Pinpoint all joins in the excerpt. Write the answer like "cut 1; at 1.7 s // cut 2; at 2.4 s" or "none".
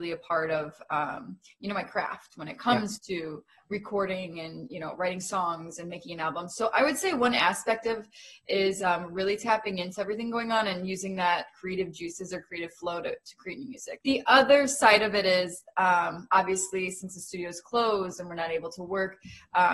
cut 1; at 14.0 s